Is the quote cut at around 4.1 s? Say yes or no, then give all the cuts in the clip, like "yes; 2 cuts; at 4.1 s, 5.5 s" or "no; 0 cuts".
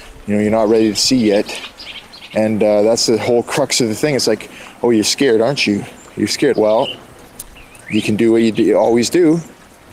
no; 1 cut; at 6.5 s